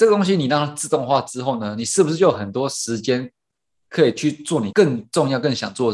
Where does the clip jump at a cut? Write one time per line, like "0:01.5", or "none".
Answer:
0:04.7